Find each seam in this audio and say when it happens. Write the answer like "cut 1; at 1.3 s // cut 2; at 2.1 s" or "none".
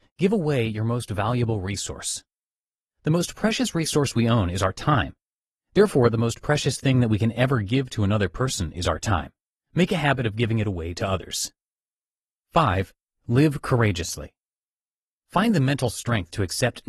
none